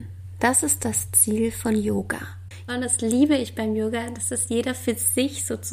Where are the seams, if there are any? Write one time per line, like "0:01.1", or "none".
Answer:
0:02.7